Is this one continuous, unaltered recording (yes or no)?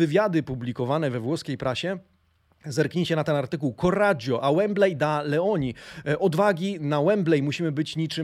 yes